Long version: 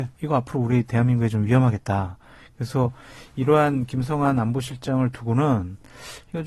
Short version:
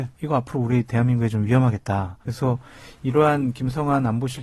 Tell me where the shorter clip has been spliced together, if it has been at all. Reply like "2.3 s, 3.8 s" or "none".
2.2 s